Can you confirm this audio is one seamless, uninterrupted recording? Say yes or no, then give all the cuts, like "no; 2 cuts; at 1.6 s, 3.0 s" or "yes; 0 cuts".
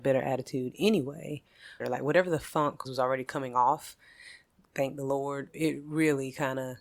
no; 3 cuts; at 1.8 s, 2.8 s, 5.5 s